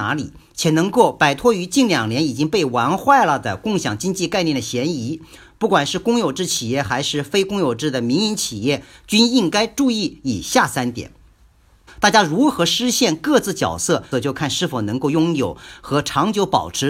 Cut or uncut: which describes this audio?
cut